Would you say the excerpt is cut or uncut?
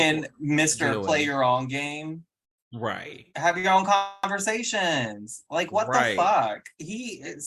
cut